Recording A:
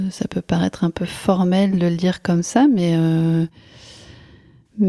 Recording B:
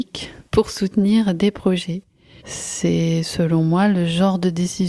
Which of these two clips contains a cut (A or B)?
B